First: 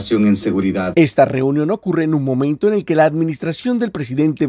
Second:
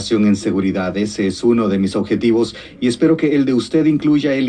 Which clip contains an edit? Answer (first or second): first